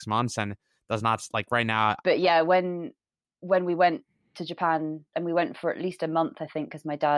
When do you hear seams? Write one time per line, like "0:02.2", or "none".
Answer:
0:02.0
0:05.1